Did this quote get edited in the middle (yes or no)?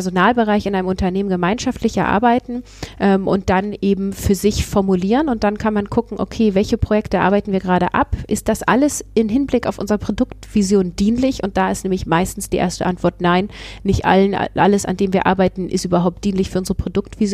no